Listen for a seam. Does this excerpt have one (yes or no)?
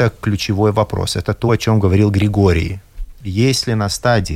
no